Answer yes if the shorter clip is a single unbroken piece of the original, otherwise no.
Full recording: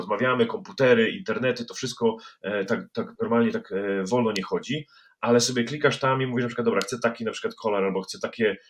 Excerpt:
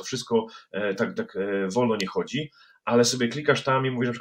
no